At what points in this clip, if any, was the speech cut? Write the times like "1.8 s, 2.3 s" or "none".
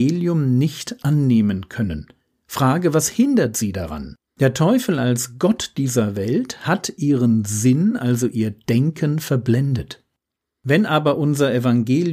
4.3 s, 10.5 s